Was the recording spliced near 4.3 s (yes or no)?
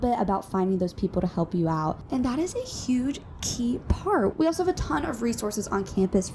yes